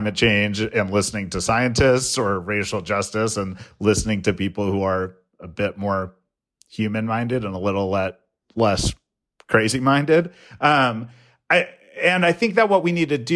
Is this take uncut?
yes; 0 cuts

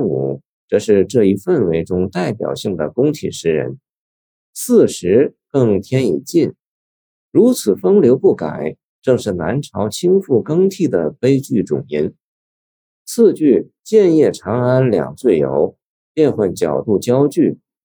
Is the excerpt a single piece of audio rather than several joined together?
yes; 0 cuts

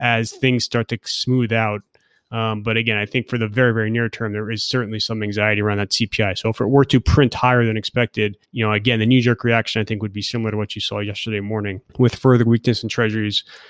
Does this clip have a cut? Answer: yes; 2 cuts; at 8.4 s, 11.9 s

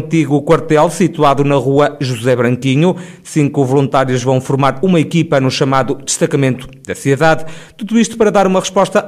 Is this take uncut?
yes; 0 cuts

